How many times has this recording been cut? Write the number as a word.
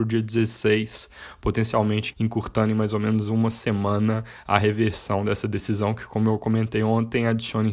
one